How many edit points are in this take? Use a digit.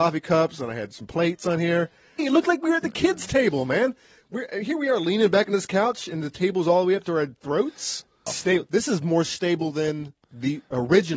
2